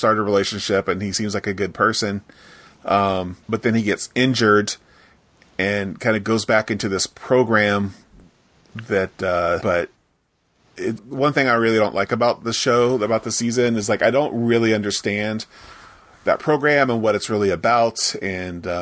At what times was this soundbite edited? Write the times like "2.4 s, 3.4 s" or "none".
3.4 s, 9.6 s, 11.0 s